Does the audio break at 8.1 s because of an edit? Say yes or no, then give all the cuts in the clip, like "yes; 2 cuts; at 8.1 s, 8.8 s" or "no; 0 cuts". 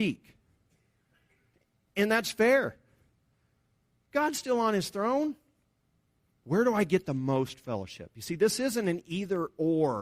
no; 2 cuts; at 4.0 s, 6.3 s